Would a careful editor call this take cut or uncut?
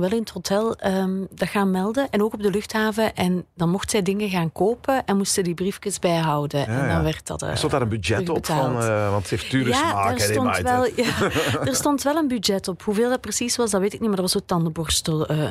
uncut